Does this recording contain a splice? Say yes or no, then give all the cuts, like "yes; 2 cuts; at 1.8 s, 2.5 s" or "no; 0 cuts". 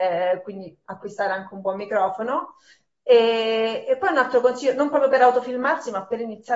no; 0 cuts